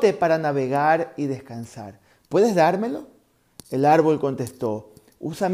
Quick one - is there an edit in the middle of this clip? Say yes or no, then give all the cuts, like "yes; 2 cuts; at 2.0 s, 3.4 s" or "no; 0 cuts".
no; 0 cuts